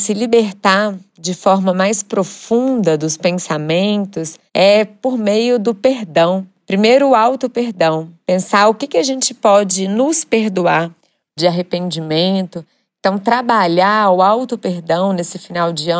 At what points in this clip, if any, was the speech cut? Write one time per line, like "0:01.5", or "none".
0:04.5
0:11.4